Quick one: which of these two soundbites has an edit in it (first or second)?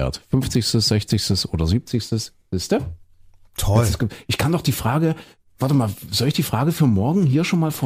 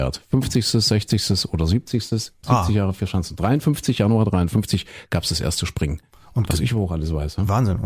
second